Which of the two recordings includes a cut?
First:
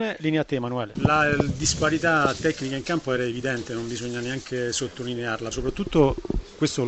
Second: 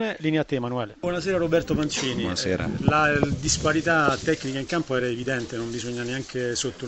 first; 2 cuts; at 0.9 s, 5.5 s

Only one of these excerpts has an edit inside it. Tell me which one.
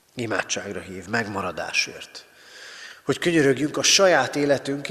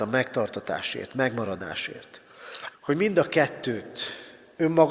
second; 1 cut; at 2.7 s

